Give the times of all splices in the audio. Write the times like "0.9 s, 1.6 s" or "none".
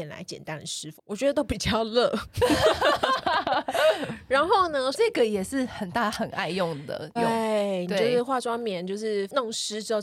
1.0 s, 4.9 s, 7.2 s